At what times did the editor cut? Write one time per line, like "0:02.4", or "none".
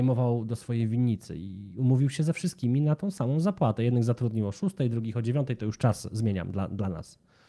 none